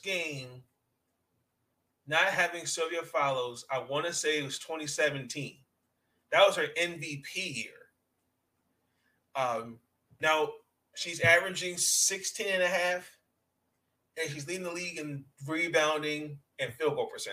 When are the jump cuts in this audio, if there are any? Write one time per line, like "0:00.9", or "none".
none